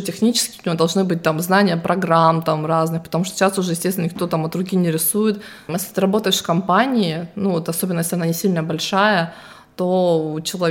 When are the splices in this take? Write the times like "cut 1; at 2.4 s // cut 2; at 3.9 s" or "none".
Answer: cut 1; at 5.7 s